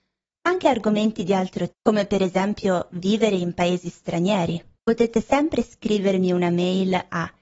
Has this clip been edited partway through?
yes; 2 cuts; at 1.7 s, 4.8 s

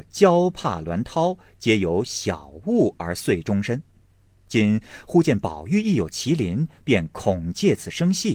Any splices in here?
no; 0 cuts

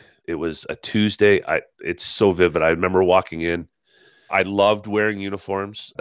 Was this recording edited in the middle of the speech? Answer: yes; 1 cut; at 4.3 s

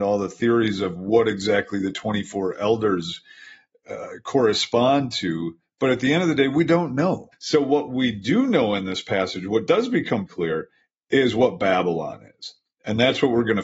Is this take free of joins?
no; 2 cuts; at 7.3 s, 10.3 s

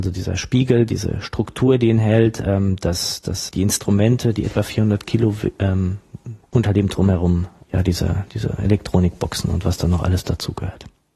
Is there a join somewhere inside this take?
yes; 3 cuts; at 3.5 s, 6.4 s, 7.6 s

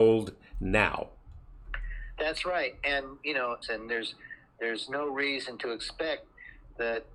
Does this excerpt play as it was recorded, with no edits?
no; 1 cut; at 3.6 s

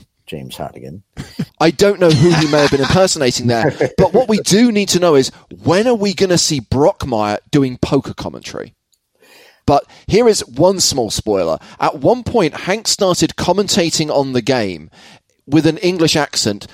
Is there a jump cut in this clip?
yes; 2 cuts; at 1.5 s, 9.6 s

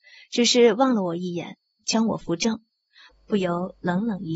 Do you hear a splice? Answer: yes; 1 cut; at 3.1 s

